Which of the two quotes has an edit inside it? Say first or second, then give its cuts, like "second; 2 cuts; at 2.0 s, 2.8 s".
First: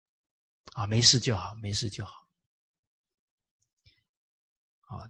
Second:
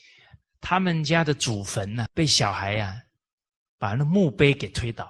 second; 1 cut; at 2.1 s